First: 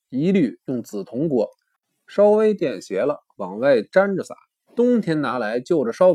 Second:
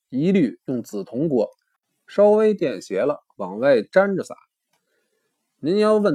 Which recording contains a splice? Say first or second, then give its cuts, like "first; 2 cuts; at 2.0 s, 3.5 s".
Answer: first; 1 cut; at 4.7 s